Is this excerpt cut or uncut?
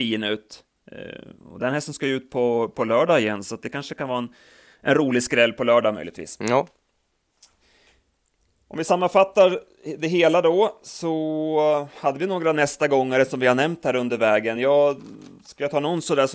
uncut